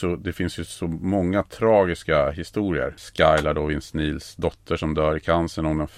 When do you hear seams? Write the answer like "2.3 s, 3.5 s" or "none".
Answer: none